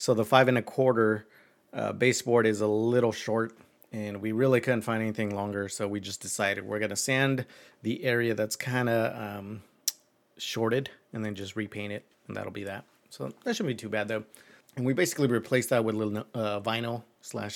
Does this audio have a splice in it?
yes; 1 cut; at 14.6 s

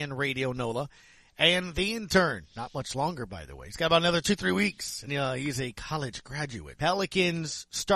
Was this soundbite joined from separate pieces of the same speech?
yes; 2 cuts; at 5.1 s, 6.7 s

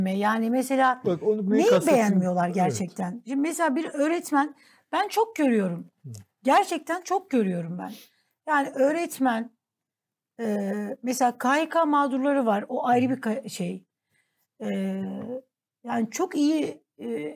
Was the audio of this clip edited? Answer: no; 0 cuts

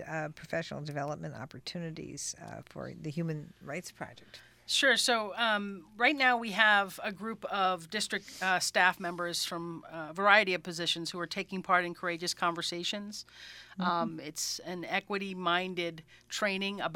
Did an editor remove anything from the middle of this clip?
no; 0 cuts

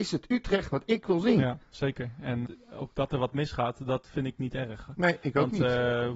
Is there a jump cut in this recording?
yes; 1 cut; at 2.5 s

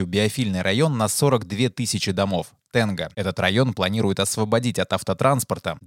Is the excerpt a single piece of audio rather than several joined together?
yes; 0 cuts

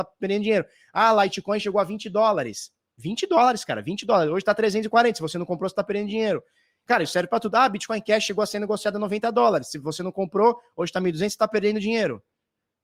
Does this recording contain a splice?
no; 0 cuts

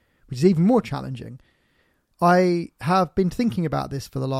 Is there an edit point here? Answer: yes; 1 cut; at 2.1 s

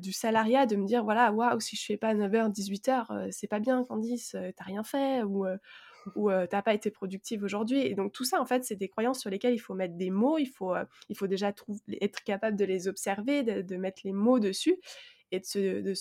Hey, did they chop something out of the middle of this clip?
no; 0 cuts

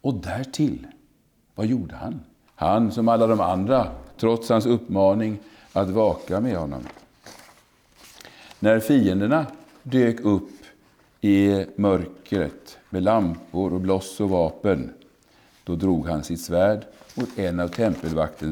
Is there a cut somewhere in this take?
yes; 2 cuts; at 2.5 s, 4.2 s

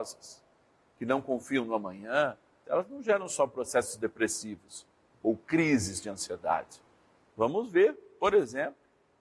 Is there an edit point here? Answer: yes; 2 cuts; at 2.6 s, 7.3 s

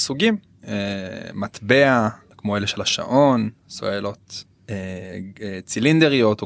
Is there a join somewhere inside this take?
no; 0 cuts

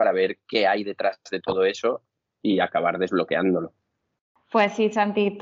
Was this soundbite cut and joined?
no; 0 cuts

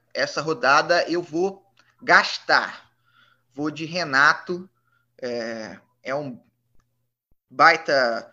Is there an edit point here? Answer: no; 0 cuts

